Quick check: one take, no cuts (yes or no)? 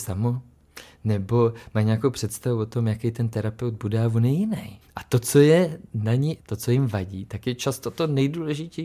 no